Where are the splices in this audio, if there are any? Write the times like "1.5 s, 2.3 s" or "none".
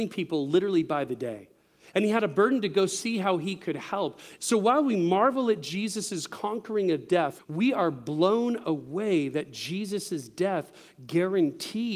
4.4 s, 7.4 s